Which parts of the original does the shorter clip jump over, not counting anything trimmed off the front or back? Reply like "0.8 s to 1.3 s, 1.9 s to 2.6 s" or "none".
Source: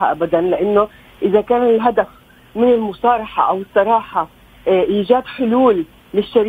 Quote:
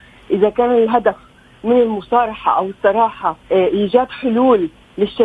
4.4 s to 4.6 s